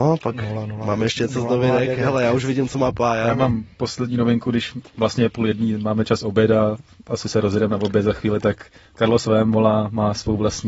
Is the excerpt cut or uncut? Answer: uncut